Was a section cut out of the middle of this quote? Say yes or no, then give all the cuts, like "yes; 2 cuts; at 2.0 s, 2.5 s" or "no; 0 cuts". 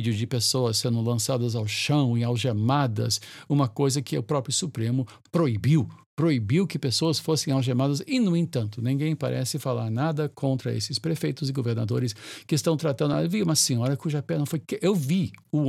no; 0 cuts